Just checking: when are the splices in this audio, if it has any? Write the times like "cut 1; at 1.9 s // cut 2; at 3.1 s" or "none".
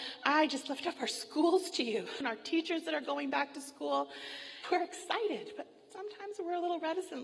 cut 1; at 2.2 s // cut 2; at 4.6 s